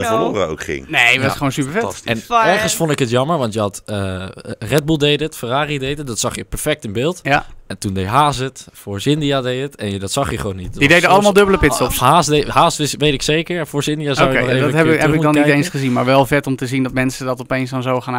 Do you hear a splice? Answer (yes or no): no